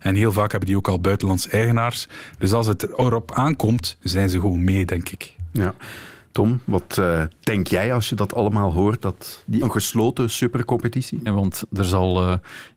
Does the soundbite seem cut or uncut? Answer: cut